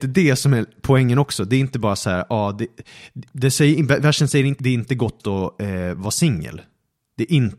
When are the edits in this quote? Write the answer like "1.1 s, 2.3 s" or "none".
4.6 s